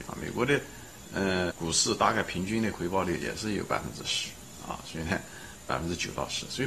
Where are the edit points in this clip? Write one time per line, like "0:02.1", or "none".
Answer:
0:01.5